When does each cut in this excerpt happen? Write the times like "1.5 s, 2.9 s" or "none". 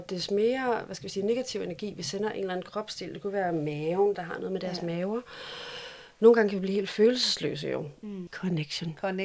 4.1 s, 8.3 s